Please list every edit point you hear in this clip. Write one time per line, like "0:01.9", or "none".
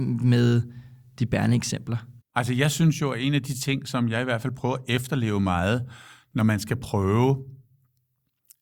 0:02.2